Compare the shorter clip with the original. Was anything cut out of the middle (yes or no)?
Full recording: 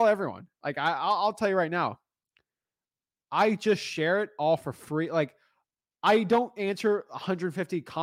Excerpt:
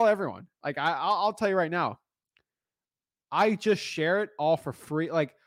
no